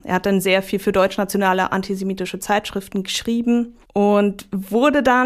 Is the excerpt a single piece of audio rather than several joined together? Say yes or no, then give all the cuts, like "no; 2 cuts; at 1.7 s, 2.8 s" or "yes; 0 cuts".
no; 1 cut; at 3.8 s